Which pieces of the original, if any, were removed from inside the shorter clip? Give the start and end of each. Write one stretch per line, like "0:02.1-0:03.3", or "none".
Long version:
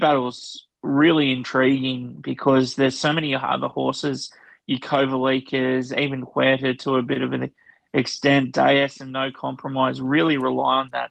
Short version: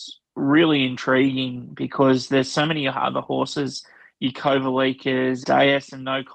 0:05.9-0:08.5

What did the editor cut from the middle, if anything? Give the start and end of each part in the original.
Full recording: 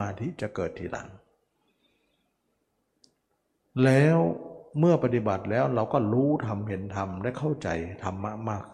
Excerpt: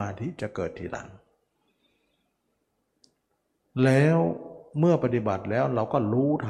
none

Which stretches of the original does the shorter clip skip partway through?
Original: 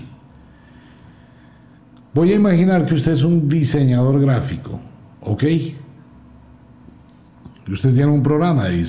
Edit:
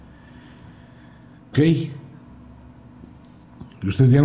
0:01.9-0:05.4

